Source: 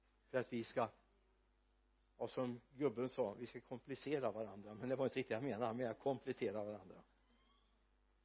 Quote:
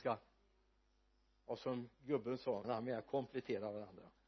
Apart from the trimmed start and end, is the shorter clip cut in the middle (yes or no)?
yes